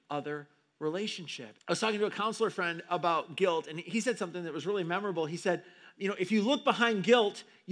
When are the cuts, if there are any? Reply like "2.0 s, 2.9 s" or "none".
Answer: 1.6 s

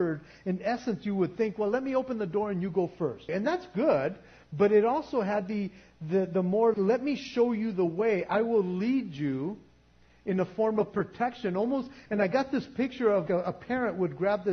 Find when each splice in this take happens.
3.3 s, 6.7 s, 13.3 s

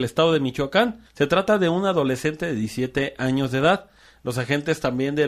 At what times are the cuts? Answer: 1.1 s

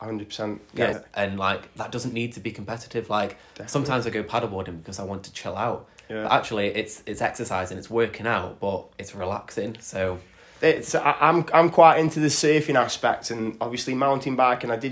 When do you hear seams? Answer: 0.9 s

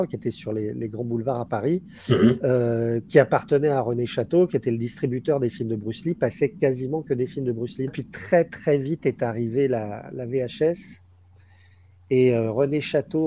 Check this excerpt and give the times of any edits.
7.9 s

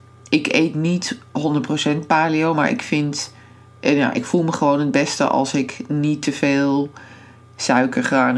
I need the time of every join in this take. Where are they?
none

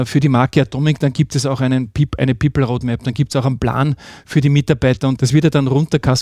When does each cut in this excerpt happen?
5.2 s

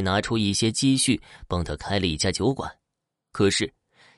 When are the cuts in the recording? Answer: none

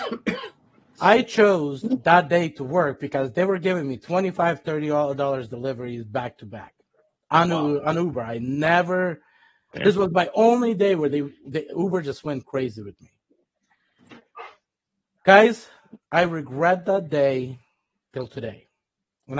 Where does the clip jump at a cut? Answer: none

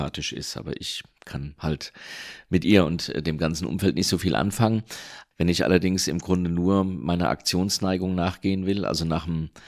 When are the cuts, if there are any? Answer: 5.3 s

